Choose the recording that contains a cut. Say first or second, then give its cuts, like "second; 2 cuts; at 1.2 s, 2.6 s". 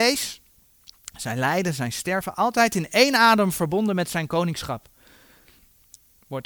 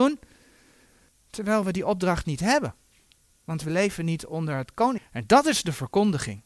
second; 1 cut; at 5.0 s